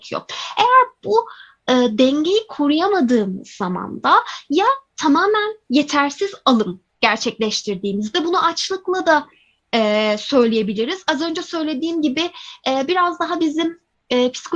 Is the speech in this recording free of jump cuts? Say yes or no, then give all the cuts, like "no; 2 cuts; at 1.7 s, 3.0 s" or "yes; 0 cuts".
yes; 0 cuts